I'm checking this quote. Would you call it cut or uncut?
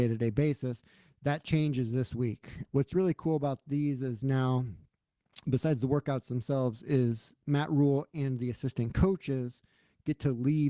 cut